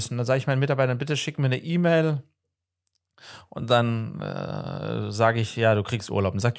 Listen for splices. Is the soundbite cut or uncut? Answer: uncut